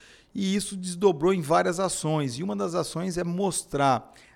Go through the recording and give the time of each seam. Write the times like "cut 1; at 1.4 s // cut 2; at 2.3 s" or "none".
none